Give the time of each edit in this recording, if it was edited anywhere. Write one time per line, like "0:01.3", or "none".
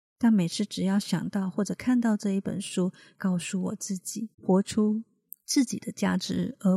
0:03.1
0:04.3